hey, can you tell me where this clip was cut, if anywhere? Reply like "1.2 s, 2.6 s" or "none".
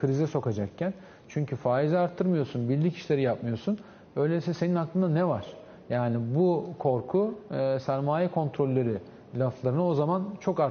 none